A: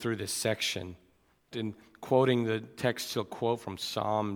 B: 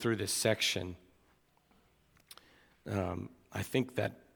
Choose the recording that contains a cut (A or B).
A